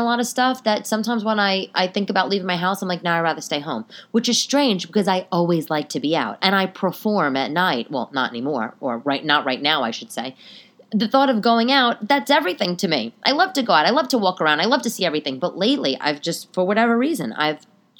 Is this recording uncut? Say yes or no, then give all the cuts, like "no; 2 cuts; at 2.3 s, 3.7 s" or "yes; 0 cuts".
yes; 0 cuts